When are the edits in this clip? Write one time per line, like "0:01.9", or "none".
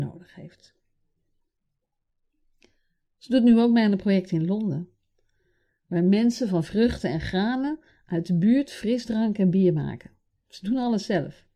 none